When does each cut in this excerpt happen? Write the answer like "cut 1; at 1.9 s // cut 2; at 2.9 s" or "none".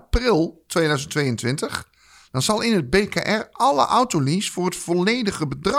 none